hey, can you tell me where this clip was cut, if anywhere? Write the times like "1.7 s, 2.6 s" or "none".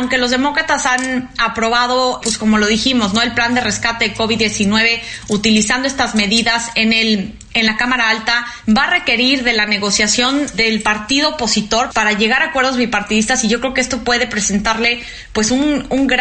2.2 s, 8.6 s